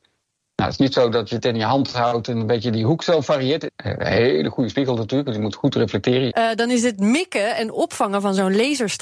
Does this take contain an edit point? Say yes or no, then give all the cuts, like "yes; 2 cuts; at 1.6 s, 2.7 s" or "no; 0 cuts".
yes; 2 cuts; at 3.7 s, 6.3 s